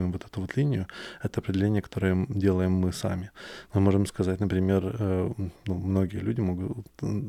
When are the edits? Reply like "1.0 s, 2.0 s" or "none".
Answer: 3.6 s